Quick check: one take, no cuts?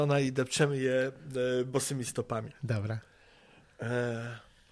yes; 0 cuts

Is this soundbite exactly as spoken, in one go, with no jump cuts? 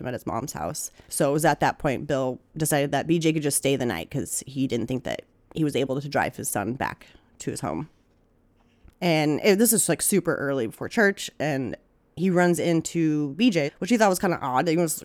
no; 3 cuts; at 1.0 s, 8.9 s, 13.7 s

